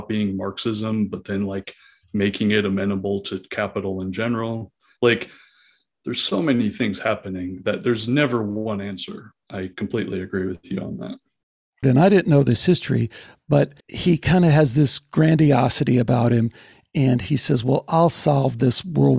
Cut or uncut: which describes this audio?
cut